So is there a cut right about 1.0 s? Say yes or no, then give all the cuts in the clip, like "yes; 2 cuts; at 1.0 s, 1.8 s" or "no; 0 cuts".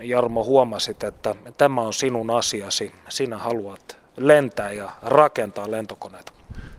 no; 0 cuts